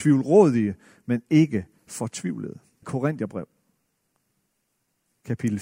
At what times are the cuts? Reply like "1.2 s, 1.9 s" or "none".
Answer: 2.8 s